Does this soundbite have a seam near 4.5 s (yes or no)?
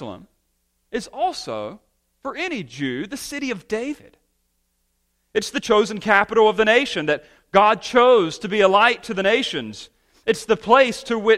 no